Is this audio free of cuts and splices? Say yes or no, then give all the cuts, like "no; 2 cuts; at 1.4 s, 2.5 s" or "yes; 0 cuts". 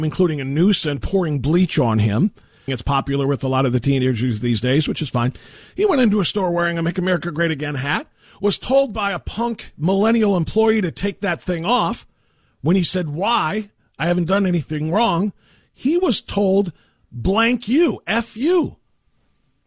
no; 1 cut; at 2.7 s